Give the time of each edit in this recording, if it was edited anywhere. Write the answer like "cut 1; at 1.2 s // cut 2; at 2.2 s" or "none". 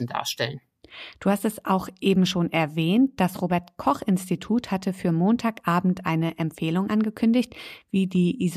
none